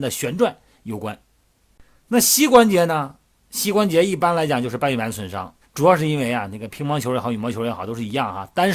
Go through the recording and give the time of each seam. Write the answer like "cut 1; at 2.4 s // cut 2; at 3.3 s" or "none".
cut 1; at 5.6 s